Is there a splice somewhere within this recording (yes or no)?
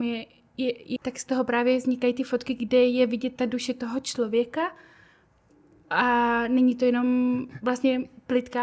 yes